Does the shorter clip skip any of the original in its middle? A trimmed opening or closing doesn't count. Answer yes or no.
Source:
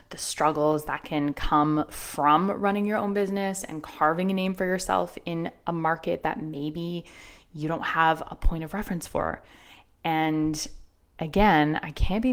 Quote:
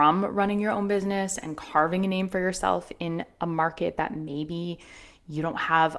no